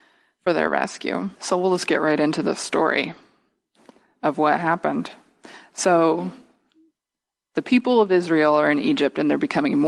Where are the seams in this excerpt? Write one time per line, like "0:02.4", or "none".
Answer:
0:01.3